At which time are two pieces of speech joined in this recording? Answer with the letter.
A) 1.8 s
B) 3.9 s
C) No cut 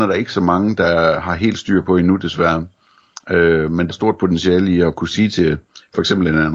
B